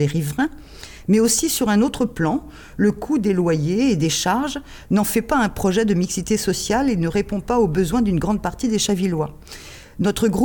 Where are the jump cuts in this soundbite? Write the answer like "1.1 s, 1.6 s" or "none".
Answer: none